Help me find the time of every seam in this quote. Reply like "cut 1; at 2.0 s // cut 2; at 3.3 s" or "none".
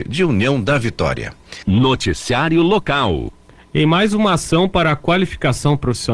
none